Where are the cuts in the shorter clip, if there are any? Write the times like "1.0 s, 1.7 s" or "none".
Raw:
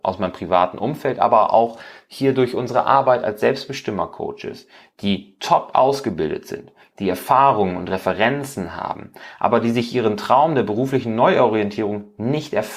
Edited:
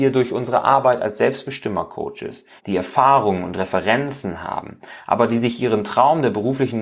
2.6 s